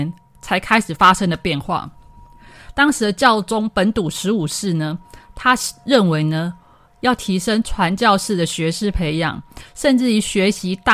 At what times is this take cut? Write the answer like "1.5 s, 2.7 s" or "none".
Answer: none